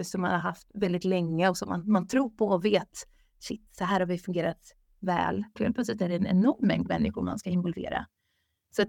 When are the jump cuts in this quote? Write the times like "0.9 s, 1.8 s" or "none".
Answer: 5.6 s